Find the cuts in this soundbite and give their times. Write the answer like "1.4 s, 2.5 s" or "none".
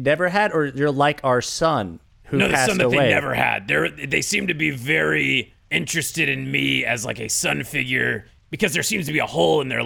5.6 s